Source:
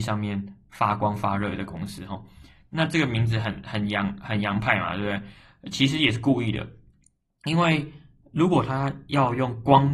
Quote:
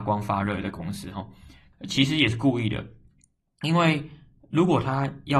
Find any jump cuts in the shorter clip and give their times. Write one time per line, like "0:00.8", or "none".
0:01.7